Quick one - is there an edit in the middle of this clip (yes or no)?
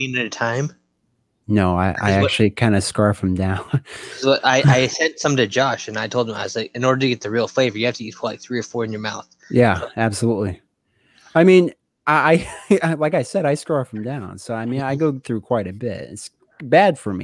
no